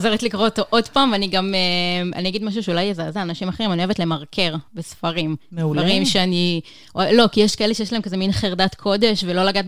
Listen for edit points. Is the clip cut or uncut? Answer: uncut